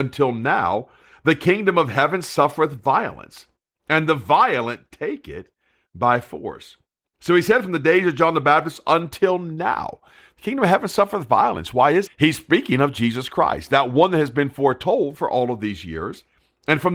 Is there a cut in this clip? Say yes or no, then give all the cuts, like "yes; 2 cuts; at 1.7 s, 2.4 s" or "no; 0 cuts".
yes; 1 cut; at 12.1 s